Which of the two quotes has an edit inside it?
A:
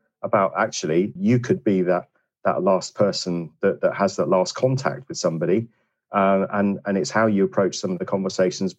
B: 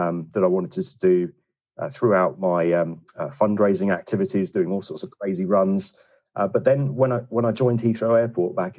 A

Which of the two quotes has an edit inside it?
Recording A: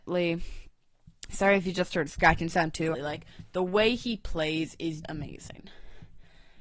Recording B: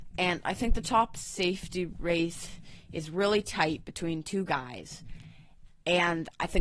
A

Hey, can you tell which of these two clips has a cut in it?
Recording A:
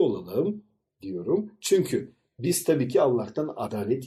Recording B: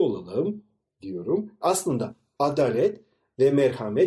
B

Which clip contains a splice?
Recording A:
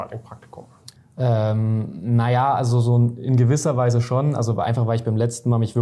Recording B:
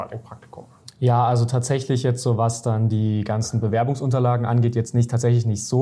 A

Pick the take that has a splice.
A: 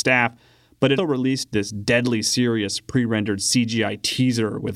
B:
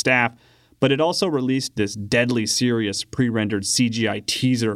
A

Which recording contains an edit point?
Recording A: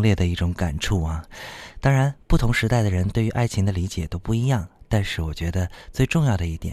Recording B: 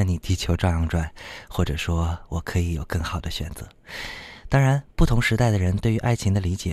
A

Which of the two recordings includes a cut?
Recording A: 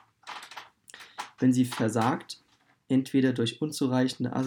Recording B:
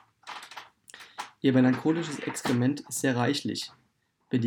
A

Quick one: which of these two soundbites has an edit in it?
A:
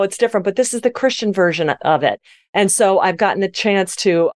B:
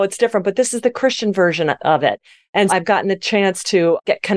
B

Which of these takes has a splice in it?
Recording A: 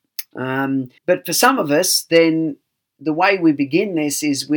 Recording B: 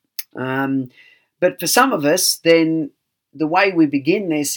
A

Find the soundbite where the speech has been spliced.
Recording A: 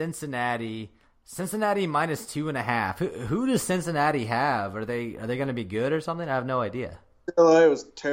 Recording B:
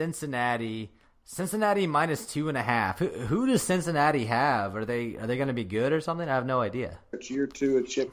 B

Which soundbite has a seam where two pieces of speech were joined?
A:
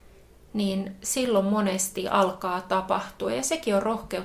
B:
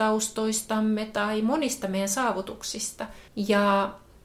B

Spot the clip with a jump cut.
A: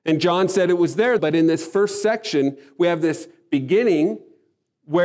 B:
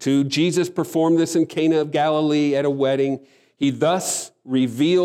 A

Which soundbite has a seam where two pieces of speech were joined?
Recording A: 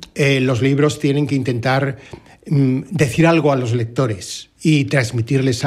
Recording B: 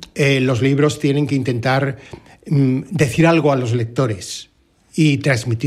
A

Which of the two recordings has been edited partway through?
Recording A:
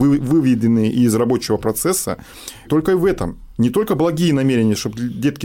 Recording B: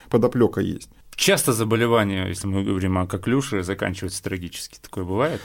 A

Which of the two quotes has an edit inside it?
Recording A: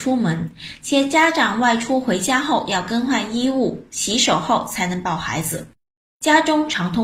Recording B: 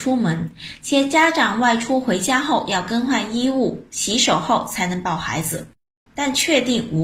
B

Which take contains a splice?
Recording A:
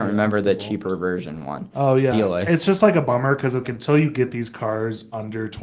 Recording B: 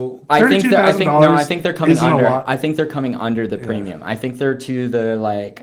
A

